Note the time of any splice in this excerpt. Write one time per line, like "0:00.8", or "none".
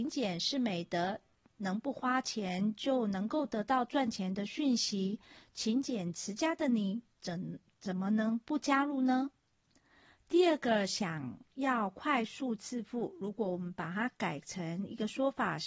none